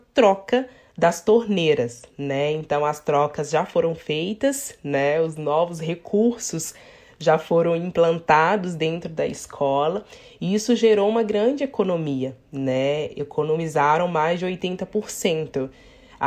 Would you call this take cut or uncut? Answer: uncut